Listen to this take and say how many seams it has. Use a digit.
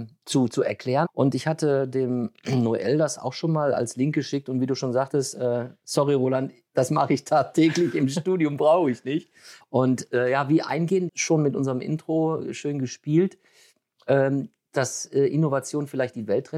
3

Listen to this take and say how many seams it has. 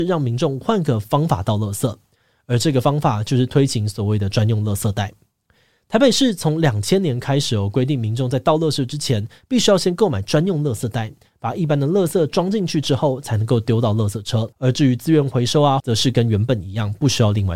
2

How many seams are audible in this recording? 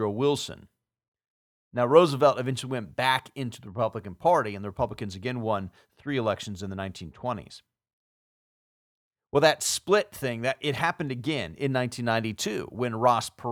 0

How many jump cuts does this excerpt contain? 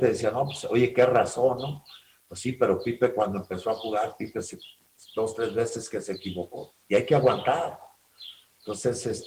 0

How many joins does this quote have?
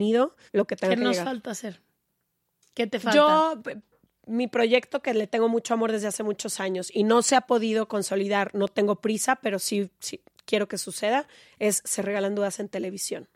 0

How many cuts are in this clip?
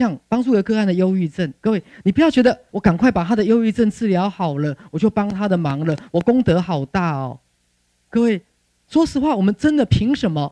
1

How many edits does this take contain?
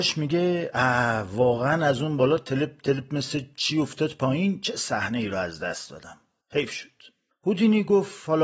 1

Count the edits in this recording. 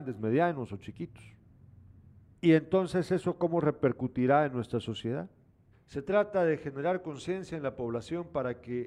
2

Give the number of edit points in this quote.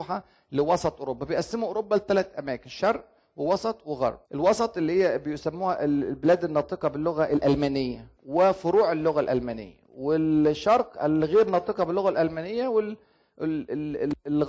2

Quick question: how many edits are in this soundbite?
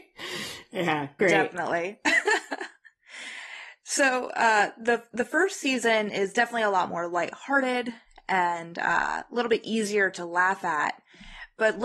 1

